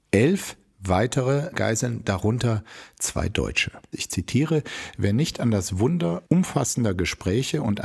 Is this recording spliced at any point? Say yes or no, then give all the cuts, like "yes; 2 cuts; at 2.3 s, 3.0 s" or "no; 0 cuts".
yes; 1 cut; at 3.9 s